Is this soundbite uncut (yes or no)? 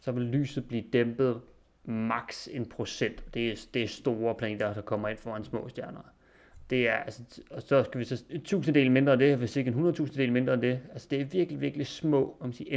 no